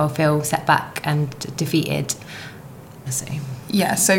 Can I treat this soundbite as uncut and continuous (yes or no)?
no